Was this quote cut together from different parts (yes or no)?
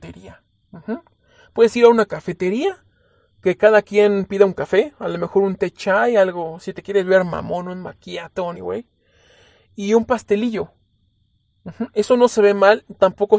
yes